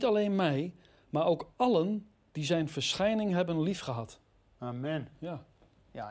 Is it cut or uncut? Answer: uncut